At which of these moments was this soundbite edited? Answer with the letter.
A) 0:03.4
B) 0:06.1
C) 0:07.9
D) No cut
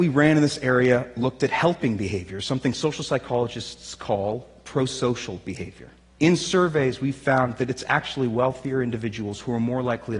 B